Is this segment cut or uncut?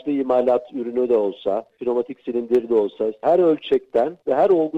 cut